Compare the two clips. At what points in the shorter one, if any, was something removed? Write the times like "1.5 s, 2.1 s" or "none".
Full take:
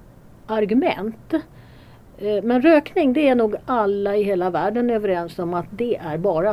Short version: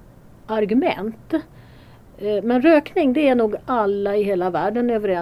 none